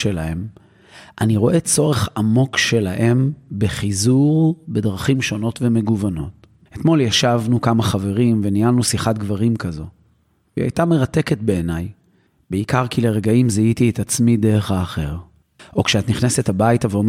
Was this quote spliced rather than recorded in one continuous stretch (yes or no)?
yes